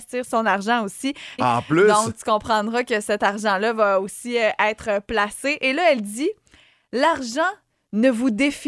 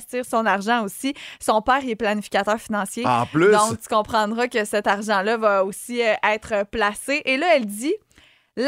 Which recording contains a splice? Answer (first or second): first